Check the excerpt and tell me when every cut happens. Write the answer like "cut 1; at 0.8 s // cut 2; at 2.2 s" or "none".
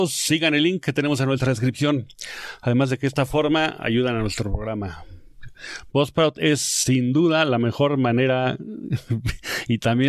none

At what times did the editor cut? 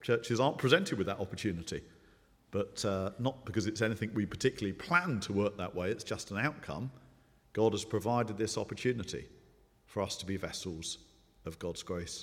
none

